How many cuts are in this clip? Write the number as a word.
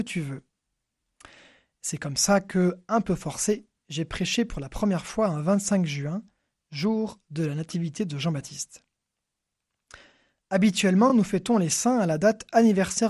zero